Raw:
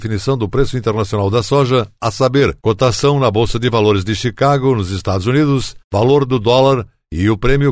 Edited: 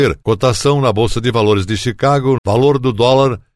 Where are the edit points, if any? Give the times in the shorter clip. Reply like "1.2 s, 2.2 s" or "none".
2.4 s